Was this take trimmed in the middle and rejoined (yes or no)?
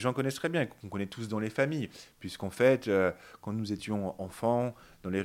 no